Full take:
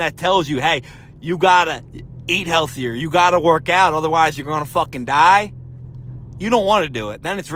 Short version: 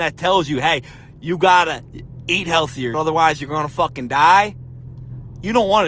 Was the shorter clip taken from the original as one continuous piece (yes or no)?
no